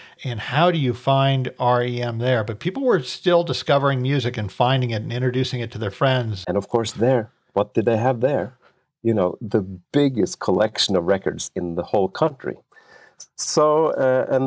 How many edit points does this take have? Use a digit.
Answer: 1